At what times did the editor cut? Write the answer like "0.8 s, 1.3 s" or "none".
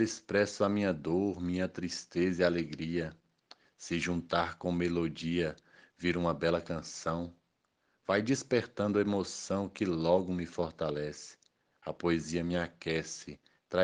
none